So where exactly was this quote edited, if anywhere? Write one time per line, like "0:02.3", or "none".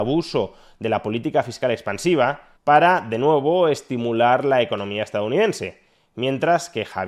0:02.6

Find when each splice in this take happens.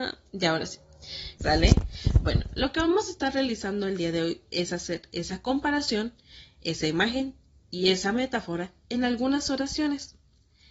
0:01.4

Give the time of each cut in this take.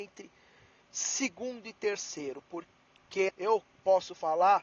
0:03.3

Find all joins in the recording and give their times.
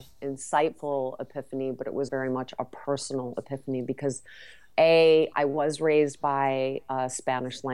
0:02.1
0:05.3

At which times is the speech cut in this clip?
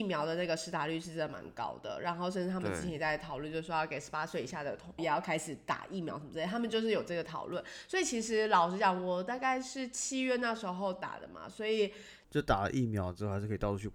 0:05.0
0:12.2

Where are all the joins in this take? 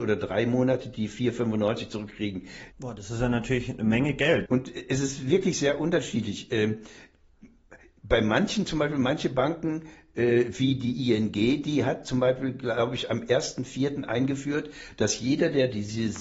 0:02.7
0:04.5

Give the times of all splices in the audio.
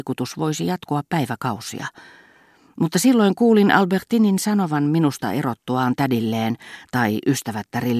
none

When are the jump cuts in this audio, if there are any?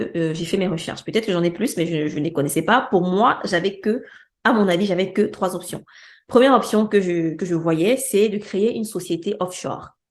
none

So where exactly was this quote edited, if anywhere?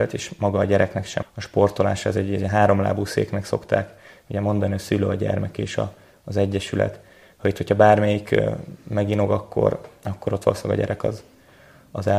0:01.2

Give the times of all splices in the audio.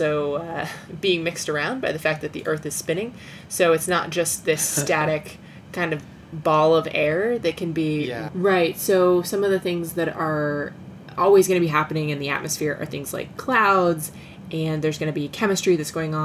0:08.3

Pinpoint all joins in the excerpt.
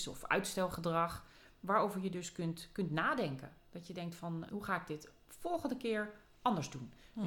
0:04.5

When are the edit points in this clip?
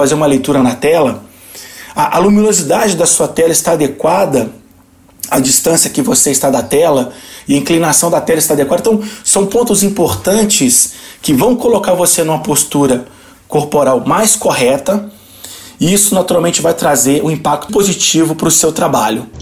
0:17.7

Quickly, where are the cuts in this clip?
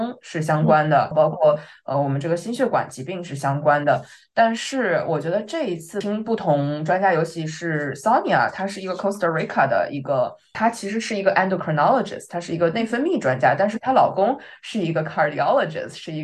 none

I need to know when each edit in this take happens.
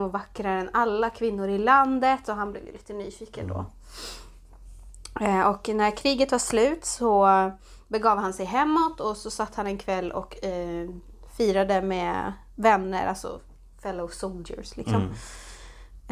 none

